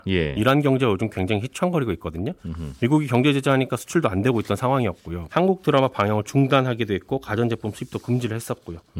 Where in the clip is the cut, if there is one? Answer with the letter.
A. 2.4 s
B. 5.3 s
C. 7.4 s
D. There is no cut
B